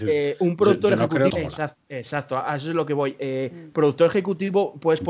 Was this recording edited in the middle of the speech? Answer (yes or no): yes